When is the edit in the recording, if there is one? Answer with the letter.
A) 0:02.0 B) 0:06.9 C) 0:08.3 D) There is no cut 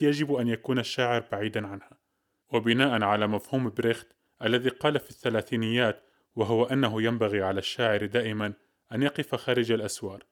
D